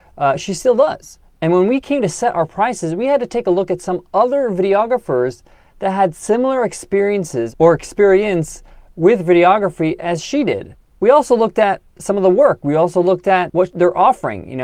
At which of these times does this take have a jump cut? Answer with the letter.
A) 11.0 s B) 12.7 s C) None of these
C